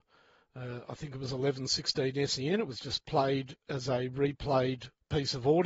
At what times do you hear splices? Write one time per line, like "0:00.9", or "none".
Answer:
none